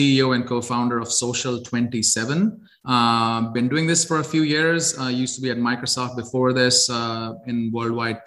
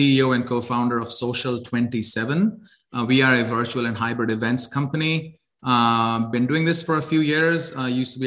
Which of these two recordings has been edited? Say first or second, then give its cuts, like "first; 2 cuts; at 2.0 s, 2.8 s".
first; 1 cut; at 2.8 s